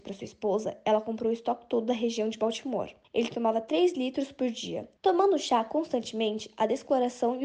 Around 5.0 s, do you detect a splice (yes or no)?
yes